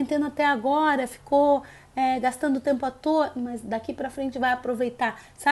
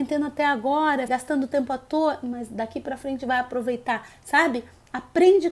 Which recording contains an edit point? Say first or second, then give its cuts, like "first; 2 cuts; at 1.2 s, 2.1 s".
second; 1 cut; at 1.1 s